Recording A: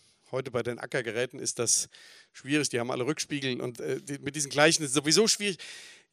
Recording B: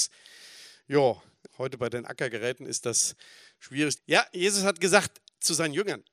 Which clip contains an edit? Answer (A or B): B